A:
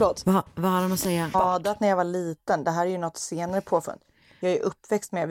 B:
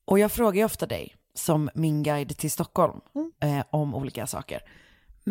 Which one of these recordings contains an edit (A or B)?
A